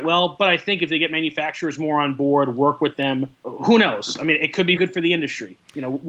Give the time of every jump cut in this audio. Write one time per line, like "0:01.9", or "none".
0:03.3
0:04.8